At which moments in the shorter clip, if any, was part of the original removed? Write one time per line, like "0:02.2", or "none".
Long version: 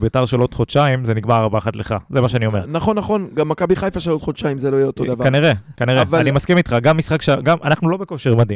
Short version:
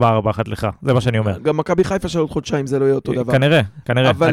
0:01.4